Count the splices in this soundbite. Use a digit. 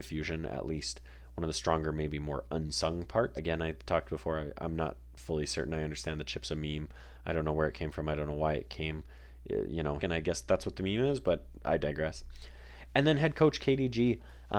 2